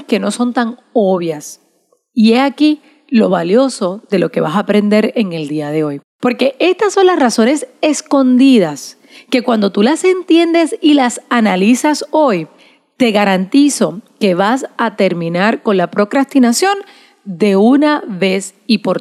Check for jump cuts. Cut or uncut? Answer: uncut